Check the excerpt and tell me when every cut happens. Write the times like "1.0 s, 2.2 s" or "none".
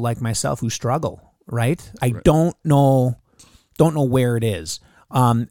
2.0 s